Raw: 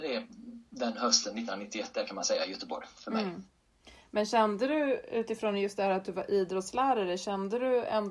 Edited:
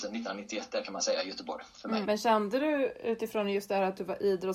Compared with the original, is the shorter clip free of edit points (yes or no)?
no